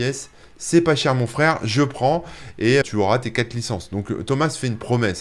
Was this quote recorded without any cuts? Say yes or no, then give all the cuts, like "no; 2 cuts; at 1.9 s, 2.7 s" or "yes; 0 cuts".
no; 1 cut; at 2.8 s